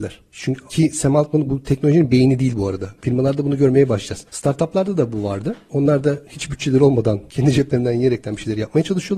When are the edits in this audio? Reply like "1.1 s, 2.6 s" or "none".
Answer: 3.0 s